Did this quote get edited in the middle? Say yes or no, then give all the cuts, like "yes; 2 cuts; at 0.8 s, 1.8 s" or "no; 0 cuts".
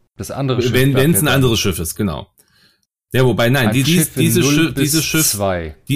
yes; 2 cuts; at 1.9 s, 3.8 s